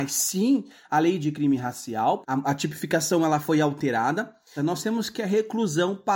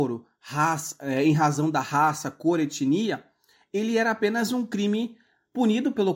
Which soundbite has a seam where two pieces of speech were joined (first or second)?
first